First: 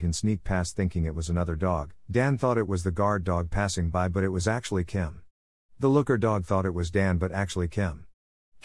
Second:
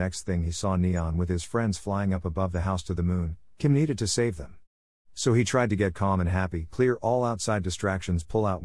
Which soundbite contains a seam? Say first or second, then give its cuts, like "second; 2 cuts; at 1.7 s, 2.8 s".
first; 1 cut; at 2.0 s